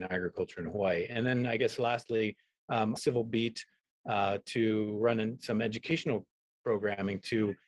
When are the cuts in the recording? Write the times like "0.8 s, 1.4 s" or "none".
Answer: 3.0 s